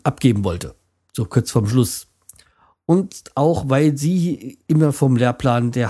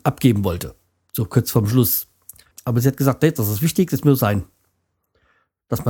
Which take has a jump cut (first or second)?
second